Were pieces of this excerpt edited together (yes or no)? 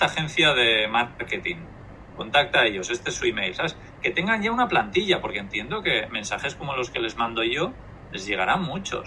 no